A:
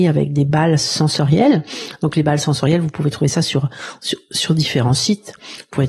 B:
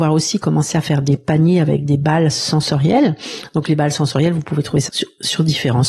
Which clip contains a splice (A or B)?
B